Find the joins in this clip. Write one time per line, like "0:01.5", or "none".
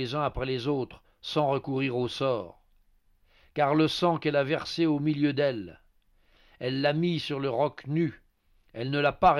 none